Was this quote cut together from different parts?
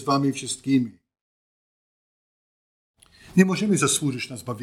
no; 0 cuts

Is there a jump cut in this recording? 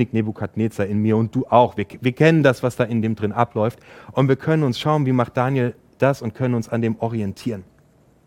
no; 0 cuts

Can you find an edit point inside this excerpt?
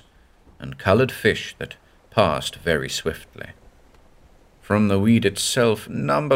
no; 0 cuts

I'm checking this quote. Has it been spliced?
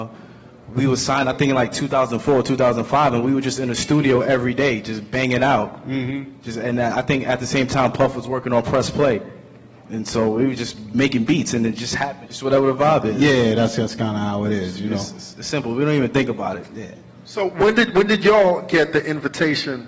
yes; 1 cut; at 12.2 s

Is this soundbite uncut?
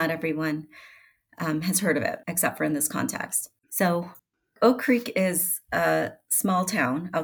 no; 1 cut; at 3.6 s

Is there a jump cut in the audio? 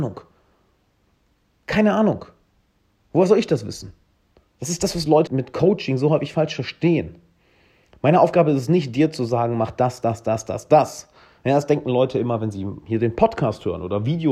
yes; 1 cut; at 5.3 s

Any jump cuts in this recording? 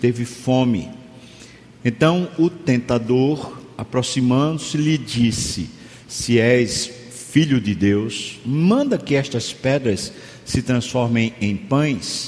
no; 0 cuts

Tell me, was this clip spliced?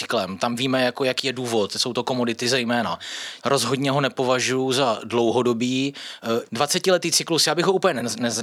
yes; 2 cuts; at 3.4 s, 6.5 s

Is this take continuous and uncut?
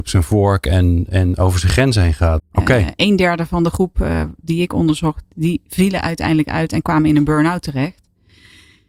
no; 1 cut; at 2.4 s

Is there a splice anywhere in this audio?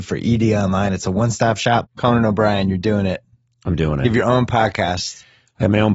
yes; 1 cut; at 1.8 s

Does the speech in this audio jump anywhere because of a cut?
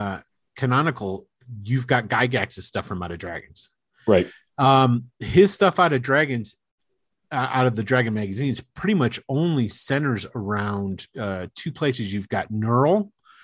no; 0 cuts

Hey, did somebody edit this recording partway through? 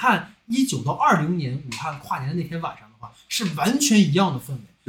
no; 0 cuts

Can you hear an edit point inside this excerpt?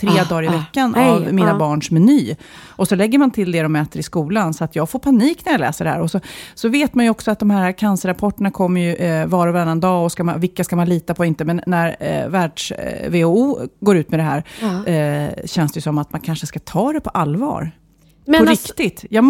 no; 0 cuts

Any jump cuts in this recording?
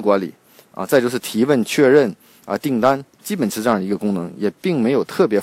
no; 0 cuts

